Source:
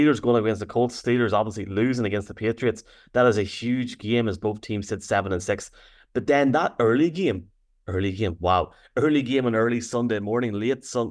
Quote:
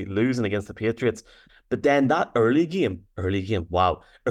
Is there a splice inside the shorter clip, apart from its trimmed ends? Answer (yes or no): yes